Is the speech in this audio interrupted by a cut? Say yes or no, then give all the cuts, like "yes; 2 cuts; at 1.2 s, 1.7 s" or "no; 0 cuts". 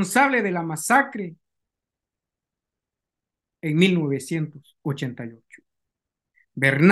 no; 0 cuts